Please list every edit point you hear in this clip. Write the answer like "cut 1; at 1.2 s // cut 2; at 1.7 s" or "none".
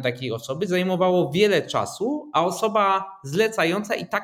none